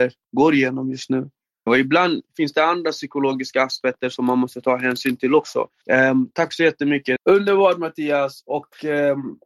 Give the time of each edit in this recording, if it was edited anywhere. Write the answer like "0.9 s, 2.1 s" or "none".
1.7 s, 5.8 s, 7.2 s